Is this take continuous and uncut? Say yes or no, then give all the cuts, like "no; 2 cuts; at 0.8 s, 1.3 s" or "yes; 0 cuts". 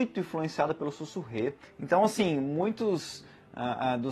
no; 1 cut; at 1.6 s